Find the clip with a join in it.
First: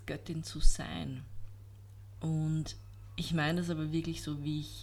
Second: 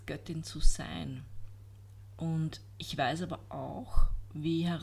first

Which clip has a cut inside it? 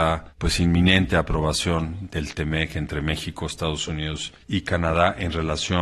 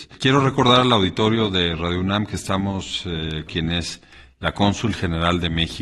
second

